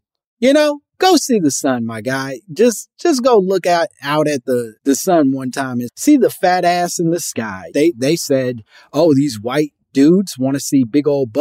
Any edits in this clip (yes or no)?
yes